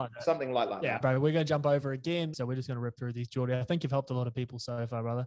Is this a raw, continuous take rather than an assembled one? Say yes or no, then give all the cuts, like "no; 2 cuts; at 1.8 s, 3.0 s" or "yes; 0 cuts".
no; 2 cuts; at 1.0 s, 2.3 s